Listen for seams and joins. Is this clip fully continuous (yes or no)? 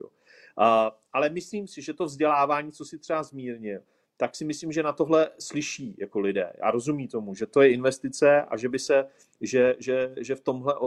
yes